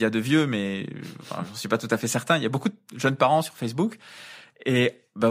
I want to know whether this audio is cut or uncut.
uncut